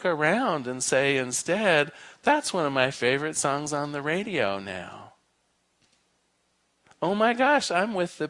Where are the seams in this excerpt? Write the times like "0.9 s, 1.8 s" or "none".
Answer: none